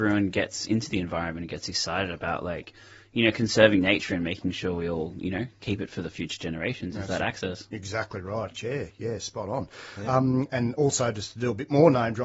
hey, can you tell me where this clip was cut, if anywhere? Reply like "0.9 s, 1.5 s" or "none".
8.5 s